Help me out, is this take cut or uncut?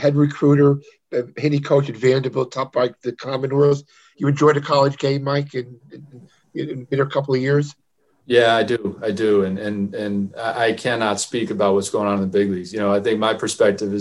uncut